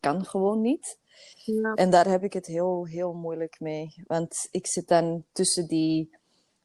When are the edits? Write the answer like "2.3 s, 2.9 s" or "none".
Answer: none